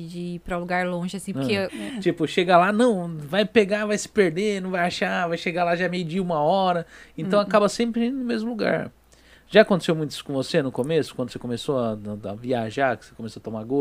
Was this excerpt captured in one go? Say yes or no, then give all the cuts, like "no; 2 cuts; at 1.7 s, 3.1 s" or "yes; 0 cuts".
no; 1 cut; at 1.7 s